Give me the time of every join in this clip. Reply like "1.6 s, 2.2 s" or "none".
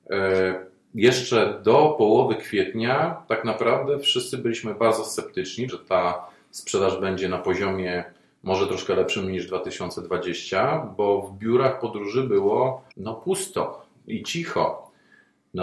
5.7 s, 12.9 s